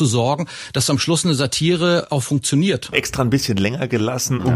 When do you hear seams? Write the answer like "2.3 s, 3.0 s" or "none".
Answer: 2.9 s